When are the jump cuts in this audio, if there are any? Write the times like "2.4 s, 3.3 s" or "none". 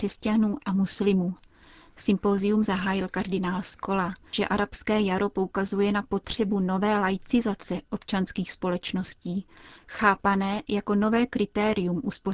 4.3 s